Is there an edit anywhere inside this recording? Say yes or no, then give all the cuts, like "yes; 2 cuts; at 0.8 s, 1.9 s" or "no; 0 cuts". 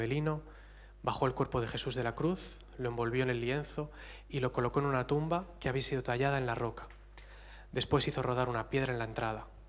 no; 0 cuts